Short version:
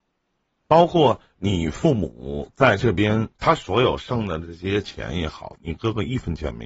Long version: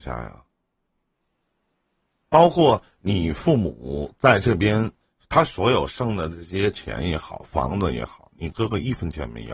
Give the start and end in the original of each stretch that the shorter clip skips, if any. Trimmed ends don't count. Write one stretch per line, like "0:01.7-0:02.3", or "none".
0:05.0-0:05.2
0:07.4-0:08.3